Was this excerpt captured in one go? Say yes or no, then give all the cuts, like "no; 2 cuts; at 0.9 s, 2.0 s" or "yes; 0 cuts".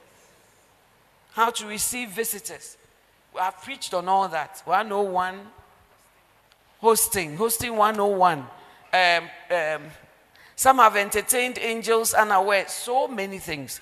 no; 1 cut; at 8.8 s